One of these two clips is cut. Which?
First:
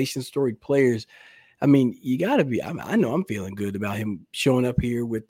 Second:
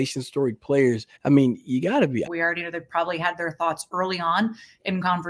second; 2 cuts; at 1.2 s, 2.3 s

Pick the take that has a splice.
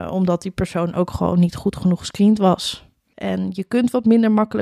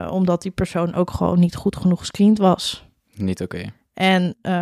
first; 1 cut; at 3.1 s

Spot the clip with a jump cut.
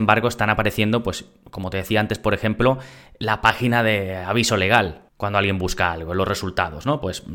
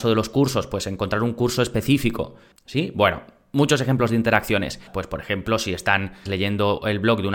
second; 3 cuts; at 2.5 s, 4.9 s, 6.3 s

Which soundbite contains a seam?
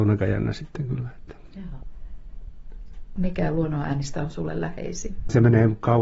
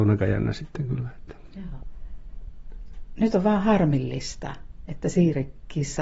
first; 1 cut; at 3.2 s

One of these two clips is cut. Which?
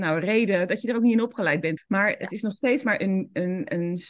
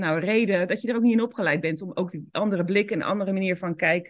first; 1 cut; at 1.8 s

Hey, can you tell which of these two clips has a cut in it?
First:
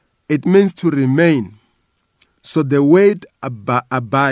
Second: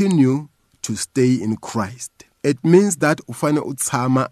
second; 1 cut; at 2.4 s

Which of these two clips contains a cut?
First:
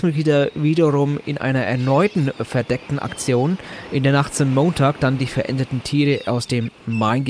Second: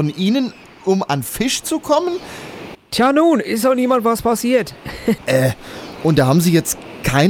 second; 2 cuts; at 2.7 s, 5.2 s

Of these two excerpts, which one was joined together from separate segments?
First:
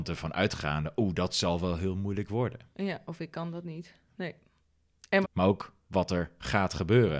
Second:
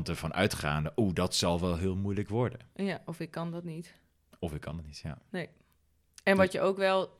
first; 2 cuts; at 4.1 s, 5.2 s

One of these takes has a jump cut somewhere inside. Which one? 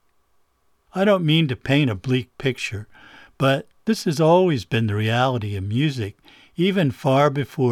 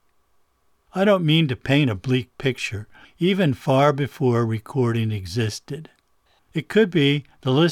second; 2 cuts; at 3.0 s, 6.4 s

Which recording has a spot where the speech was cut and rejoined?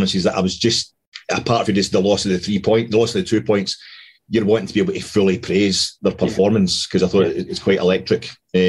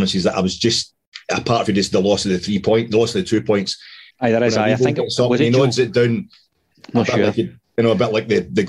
second; 1 cut; at 4.1 s

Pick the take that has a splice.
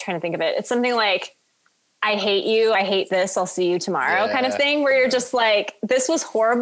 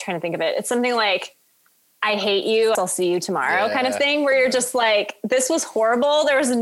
second; 1 cut; at 2.7 s

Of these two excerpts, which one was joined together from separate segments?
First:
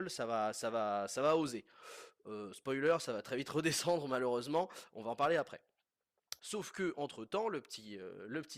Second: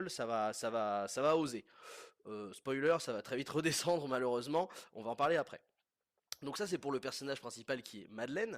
first; 1 cut; at 6.4 s

